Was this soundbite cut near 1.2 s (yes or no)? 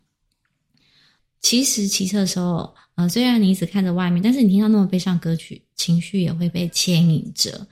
yes